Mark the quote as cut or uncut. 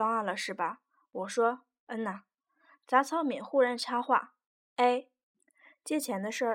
uncut